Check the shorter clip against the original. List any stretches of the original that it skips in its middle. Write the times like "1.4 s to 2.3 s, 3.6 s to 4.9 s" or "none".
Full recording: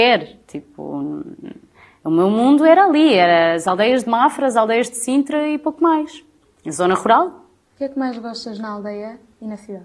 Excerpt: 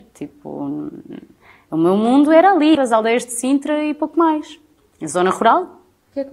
3.1 s to 4.4 s